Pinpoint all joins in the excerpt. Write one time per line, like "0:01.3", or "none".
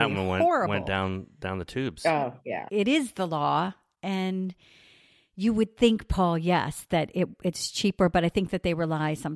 0:02.7